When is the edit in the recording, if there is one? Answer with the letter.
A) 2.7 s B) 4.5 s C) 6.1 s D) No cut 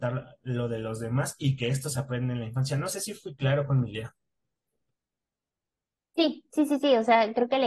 D